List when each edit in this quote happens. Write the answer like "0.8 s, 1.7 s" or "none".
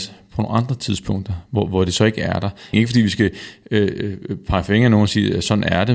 2.7 s